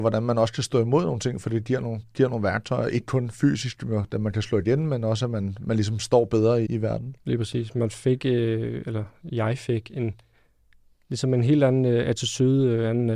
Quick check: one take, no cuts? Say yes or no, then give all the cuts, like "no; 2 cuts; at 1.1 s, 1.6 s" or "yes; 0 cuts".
no; 1 cut; at 6.7 s